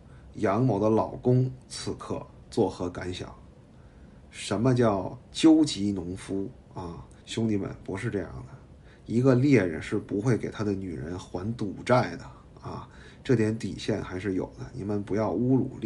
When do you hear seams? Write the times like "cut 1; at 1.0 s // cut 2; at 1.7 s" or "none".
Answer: cut 1; at 7.2 s